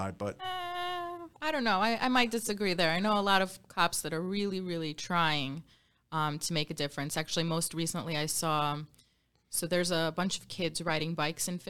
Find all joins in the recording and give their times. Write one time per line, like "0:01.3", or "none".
none